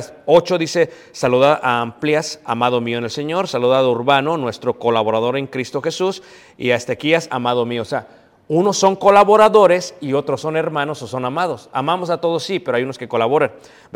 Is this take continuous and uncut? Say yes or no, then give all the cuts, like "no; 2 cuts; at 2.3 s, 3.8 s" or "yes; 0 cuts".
yes; 0 cuts